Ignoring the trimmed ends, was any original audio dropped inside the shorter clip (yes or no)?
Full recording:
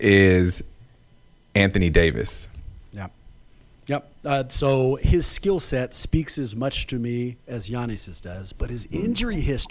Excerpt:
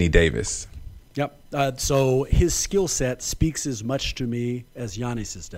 yes